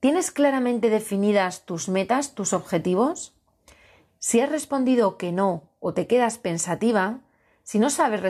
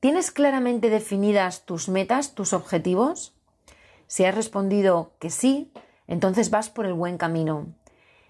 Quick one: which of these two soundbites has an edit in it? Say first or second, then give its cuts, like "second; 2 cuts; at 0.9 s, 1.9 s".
first; 1 cut; at 4.1 s